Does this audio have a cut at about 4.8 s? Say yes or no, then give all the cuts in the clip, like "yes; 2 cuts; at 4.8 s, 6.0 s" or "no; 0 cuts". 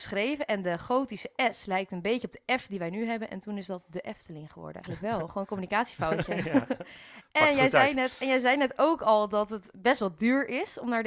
yes; 1 cut; at 4.8 s